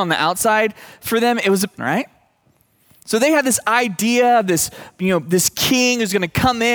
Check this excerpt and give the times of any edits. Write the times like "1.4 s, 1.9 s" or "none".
1.8 s